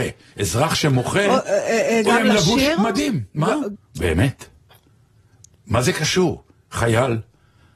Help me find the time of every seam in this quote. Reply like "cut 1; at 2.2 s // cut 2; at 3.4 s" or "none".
cut 1; at 3.7 s